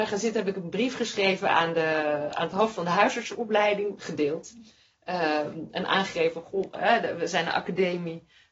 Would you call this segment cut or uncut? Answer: cut